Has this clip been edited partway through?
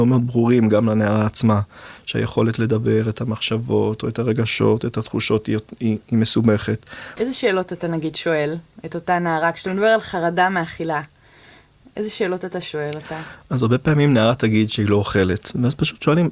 yes; 1 cut; at 7.2 s

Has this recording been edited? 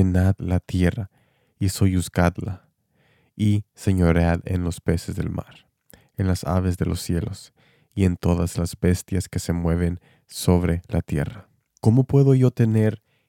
yes; 1 cut; at 11.7 s

